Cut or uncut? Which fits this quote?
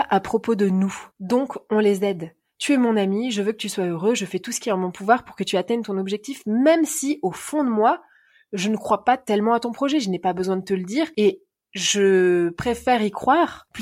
cut